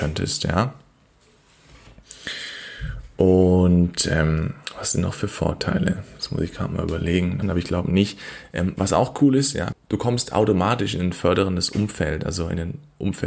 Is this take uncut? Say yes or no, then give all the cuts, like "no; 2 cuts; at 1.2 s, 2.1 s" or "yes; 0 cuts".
no; 2 cuts; at 7.4 s, 9.7 s